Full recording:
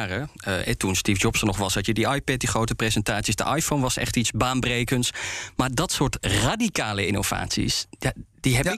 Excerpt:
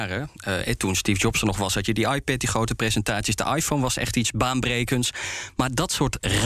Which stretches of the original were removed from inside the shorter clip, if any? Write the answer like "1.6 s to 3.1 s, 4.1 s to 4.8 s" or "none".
none